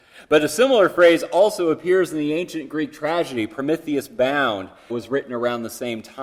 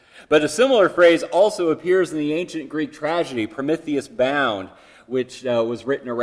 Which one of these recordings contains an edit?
first; 1 cut; at 4.9 s

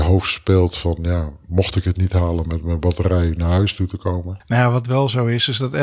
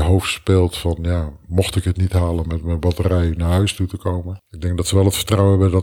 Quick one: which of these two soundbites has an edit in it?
first; 1 cut; at 4.4 s

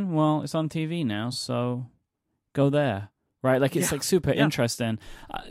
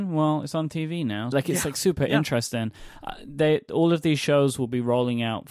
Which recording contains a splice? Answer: second; 1 cut; at 1.3 s

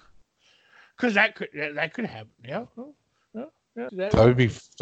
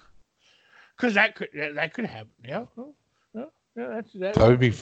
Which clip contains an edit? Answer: first; 1 cut; at 3.9 s

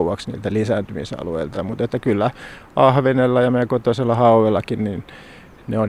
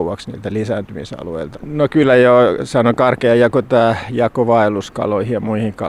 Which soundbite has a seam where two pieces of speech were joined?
second; 1 cut; at 1.5 s

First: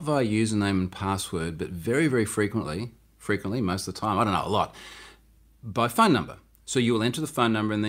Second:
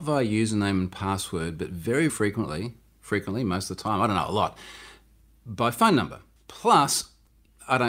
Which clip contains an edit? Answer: second; 2 cuts; at 2.1 s, 6.4 s

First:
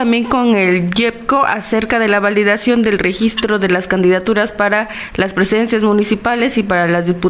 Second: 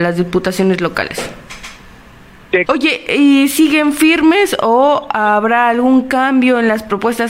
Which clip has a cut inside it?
second; 1 cut; at 2.7 s

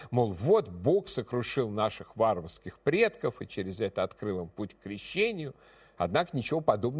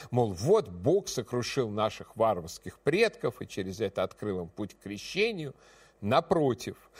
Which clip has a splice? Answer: second; 1 cut; at 5.9 s

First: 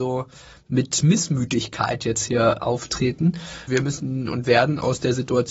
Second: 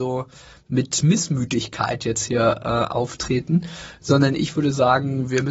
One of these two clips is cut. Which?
first; 2 cuts; at 2.6 s, 3.7 s

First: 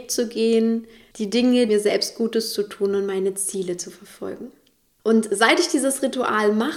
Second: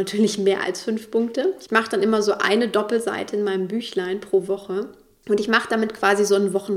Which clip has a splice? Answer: first; 1 cut; at 1.7 s

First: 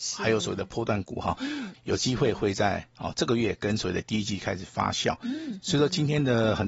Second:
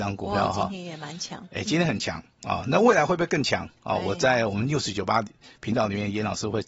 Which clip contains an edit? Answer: first; 1 cut; at 1.7 s

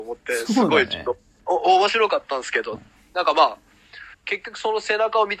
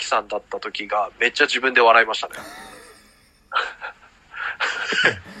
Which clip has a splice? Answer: first; 2 cuts; at 2.8 s, 4.1 s

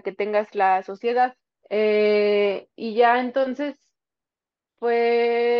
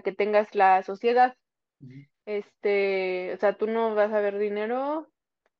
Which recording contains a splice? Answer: first; 1 cut; at 1.6 s

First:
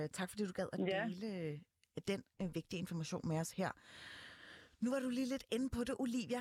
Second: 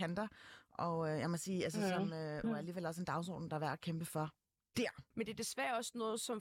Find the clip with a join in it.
second; 2 cuts; at 2.4 s, 5.1 s

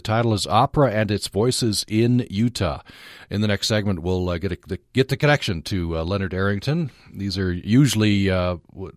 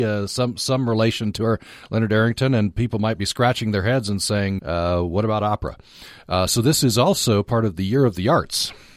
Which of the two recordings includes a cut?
second; 1 cut; at 4.6 s

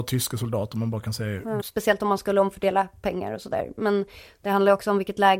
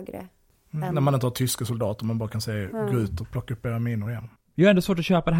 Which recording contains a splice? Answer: first; 1 cut; at 1.6 s

